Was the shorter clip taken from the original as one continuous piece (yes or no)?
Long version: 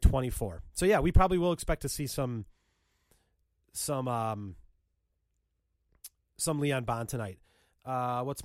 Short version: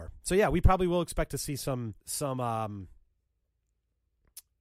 no